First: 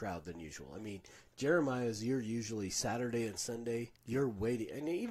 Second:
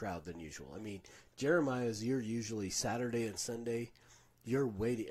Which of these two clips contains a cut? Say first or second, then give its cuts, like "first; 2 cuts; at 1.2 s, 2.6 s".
first; 1 cut; at 4.0 s